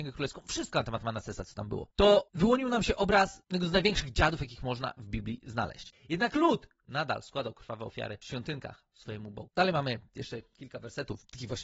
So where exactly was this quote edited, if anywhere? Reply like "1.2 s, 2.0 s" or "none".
5.9 s, 8.9 s